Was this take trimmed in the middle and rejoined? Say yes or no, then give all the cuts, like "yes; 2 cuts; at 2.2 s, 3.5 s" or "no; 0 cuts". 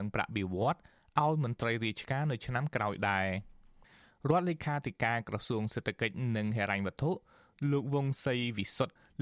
no; 0 cuts